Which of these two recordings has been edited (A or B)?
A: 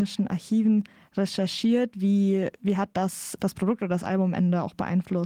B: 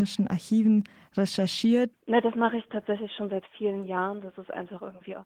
B